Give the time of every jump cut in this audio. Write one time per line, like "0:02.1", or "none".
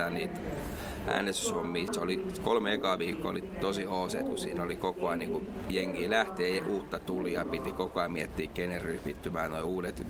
0:01.9
0:03.4

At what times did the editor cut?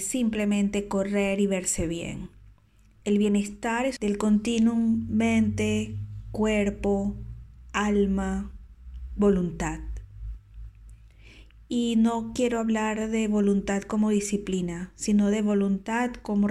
0:09.1

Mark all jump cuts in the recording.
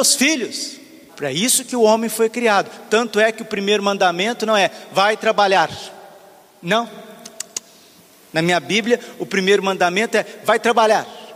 0:01.1

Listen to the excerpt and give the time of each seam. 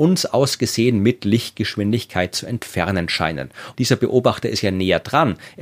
0:03.7

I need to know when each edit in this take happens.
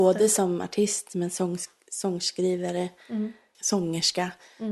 0:03.5

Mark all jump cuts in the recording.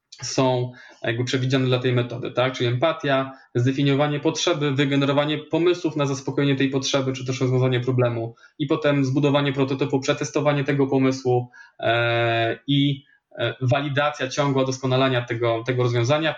none

